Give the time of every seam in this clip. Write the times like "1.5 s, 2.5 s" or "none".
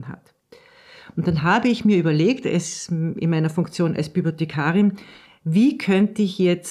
none